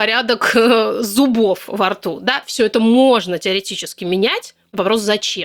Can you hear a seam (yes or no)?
no